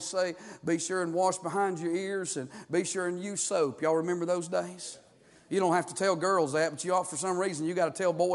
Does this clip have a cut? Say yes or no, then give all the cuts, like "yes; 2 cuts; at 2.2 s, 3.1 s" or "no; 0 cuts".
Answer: no; 0 cuts